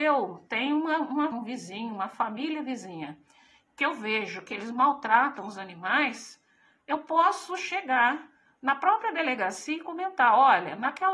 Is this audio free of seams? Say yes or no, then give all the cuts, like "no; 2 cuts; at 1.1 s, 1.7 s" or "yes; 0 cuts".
no; 1 cut; at 1.3 s